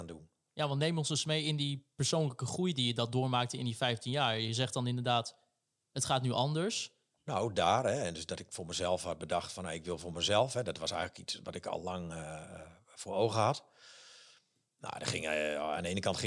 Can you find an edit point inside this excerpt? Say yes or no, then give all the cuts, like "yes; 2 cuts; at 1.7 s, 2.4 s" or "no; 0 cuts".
yes; 1 cut; at 7.2 s